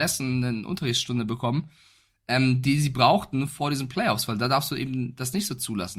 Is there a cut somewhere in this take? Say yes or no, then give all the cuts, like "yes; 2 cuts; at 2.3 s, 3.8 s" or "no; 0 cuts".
no; 0 cuts